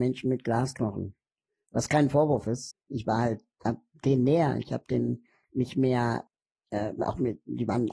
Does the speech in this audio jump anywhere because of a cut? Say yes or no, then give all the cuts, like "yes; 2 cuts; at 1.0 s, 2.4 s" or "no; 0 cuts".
yes; 1 cut; at 2.7 s